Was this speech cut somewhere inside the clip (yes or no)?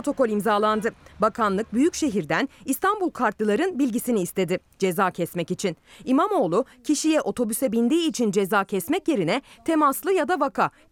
no